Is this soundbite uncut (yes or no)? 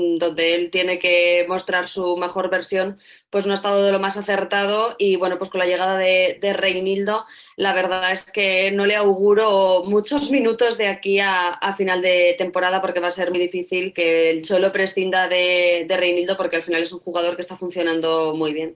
no